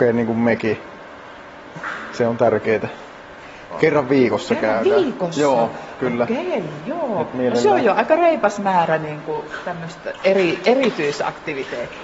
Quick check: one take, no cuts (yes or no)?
no